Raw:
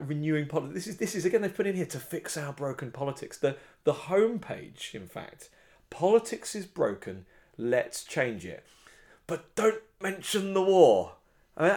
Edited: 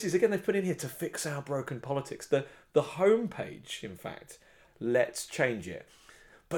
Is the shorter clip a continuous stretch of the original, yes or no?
no